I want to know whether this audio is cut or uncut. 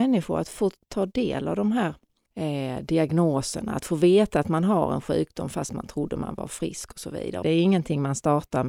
cut